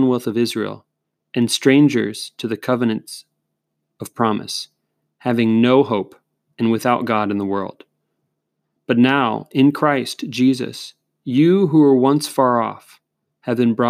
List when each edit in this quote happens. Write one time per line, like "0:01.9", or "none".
none